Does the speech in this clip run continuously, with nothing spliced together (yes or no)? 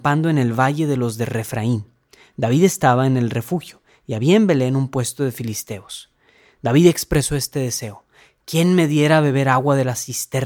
yes